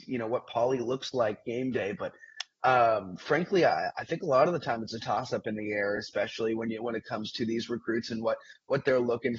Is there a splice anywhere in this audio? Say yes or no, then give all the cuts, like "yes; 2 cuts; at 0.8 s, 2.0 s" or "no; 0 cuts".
no; 0 cuts